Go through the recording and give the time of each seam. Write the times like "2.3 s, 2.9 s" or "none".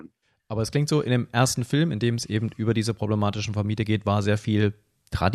none